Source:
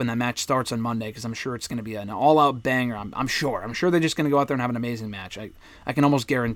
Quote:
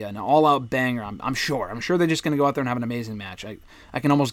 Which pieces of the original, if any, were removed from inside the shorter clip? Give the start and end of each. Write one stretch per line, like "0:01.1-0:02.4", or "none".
none